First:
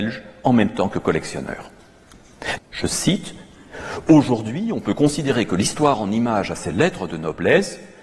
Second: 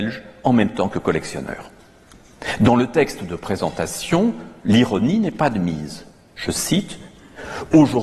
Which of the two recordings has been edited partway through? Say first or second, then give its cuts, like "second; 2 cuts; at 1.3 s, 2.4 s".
first; 1 cut; at 2.6 s